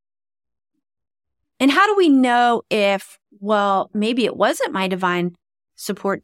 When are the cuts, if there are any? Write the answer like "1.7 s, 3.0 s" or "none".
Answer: 1.4 s